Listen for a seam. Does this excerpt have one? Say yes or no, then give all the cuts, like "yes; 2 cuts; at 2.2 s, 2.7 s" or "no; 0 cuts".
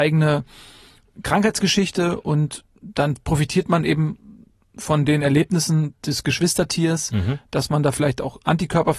no; 0 cuts